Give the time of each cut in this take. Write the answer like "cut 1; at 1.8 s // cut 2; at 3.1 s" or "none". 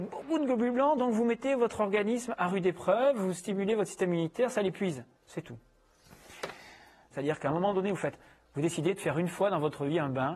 cut 1; at 5.2 s // cut 2; at 7.1 s

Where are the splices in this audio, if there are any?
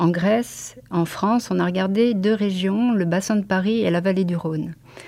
none

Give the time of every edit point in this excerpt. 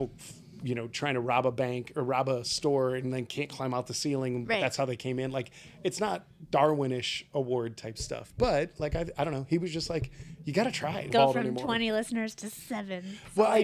cut 1; at 11.1 s

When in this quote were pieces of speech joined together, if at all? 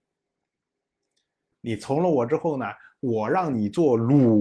cut 1; at 1.5 s

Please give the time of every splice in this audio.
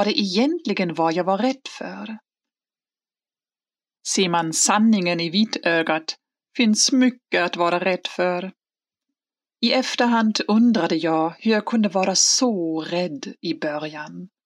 cut 1; at 4.0 s // cut 2; at 9.4 s

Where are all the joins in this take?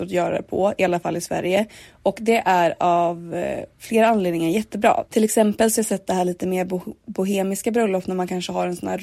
cut 1; at 5.0 s

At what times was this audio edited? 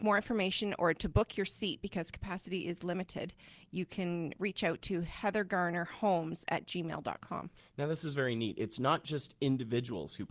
none

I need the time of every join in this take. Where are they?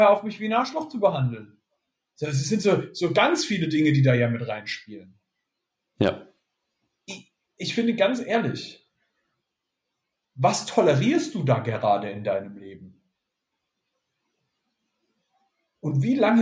cut 1; at 7.5 s // cut 2; at 10.2 s

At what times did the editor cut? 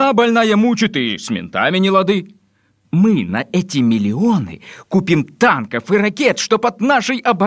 cut 1; at 2.8 s

